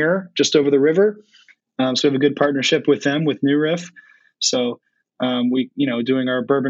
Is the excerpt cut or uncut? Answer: uncut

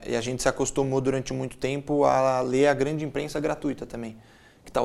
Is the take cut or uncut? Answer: uncut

